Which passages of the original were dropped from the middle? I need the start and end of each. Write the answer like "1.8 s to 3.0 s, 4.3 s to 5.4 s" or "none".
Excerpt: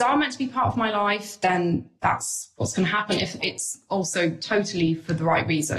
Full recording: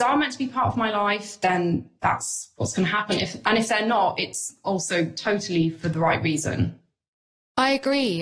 3.4 s to 4.2 s